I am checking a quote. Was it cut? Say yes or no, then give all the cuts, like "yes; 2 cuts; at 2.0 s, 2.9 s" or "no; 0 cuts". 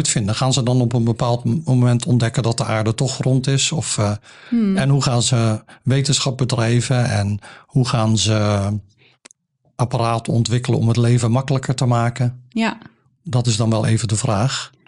no; 0 cuts